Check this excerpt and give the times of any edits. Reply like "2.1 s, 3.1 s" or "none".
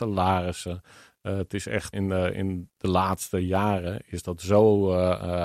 1.9 s